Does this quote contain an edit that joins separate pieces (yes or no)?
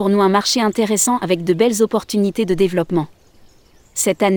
no